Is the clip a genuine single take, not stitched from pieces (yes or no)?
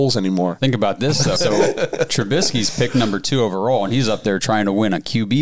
no